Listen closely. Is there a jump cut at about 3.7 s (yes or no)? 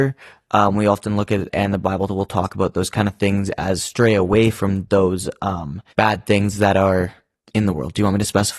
no